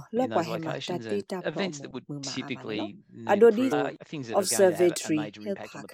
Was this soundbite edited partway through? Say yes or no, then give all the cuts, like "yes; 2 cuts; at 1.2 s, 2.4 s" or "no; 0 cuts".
yes; 1 cut; at 3.7 s